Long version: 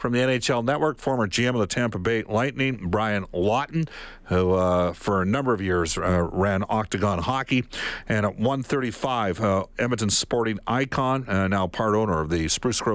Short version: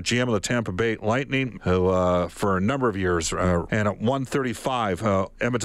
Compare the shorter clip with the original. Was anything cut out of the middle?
yes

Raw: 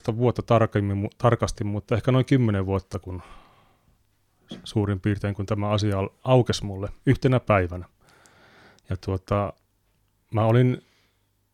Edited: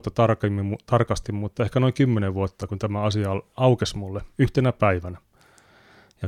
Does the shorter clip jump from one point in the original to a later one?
yes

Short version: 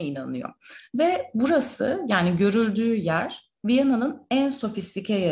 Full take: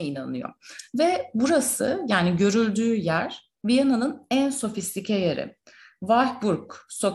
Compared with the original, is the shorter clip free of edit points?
yes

